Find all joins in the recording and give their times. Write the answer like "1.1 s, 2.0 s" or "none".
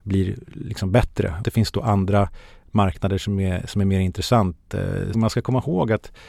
1.4 s, 5.1 s